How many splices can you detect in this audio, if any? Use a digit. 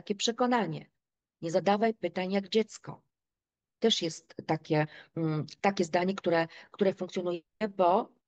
1